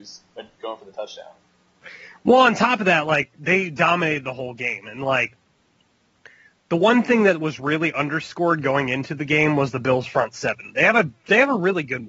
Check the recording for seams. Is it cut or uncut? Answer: uncut